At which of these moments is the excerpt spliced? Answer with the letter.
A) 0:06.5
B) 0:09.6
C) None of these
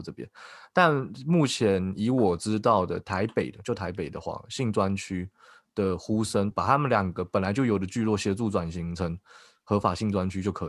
A